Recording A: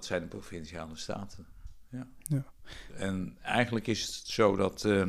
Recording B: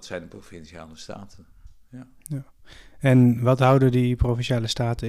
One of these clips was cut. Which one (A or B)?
A